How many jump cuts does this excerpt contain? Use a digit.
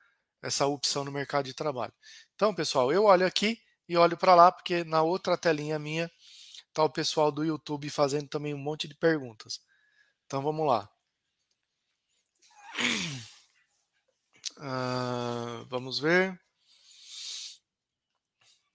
0